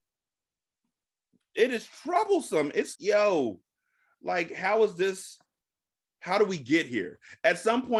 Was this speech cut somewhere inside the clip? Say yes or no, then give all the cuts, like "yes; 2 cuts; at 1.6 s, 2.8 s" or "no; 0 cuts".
yes; 1 cut; at 3.0 s